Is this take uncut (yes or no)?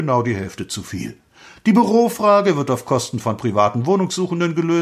yes